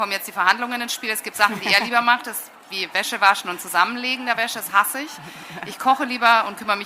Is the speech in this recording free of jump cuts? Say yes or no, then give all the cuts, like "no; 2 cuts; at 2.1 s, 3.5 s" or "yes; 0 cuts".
yes; 0 cuts